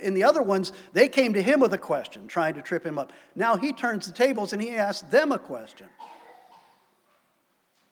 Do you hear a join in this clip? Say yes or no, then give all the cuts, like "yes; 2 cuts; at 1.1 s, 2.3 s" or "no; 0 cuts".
no; 0 cuts